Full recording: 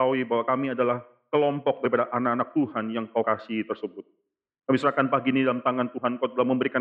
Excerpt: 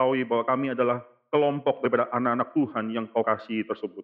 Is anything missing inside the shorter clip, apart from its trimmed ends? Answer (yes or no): no